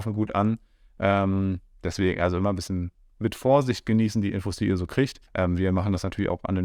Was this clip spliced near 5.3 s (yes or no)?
yes